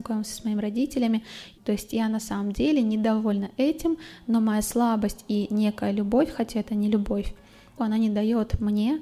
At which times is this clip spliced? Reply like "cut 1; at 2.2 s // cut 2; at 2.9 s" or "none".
cut 1; at 1.6 s // cut 2; at 7.8 s